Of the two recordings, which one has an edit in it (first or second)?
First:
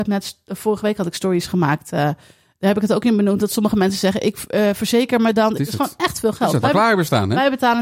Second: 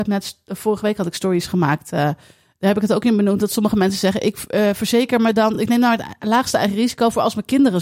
first